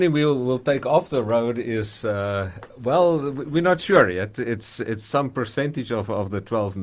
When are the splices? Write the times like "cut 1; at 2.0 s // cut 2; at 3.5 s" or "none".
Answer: none

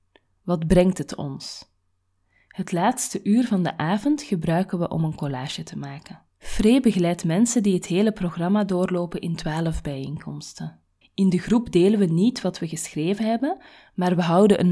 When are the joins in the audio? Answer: cut 1; at 6.3 s // cut 2; at 11.0 s

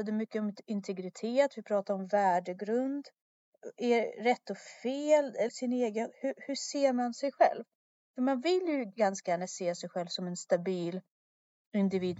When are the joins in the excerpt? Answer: cut 1; at 5.5 s

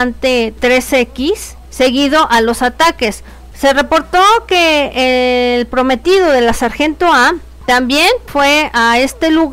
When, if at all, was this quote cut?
cut 1; at 3.5 s // cut 2; at 8.3 s

